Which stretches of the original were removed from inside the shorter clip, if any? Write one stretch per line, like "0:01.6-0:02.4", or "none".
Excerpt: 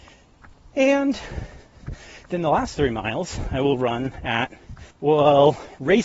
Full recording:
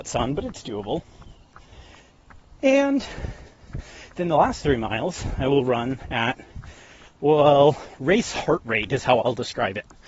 0:06.8-0:07.1